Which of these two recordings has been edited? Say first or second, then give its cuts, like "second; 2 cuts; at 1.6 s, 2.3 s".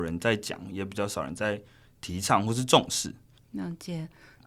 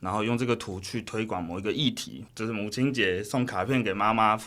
first; 1 cut; at 3.4 s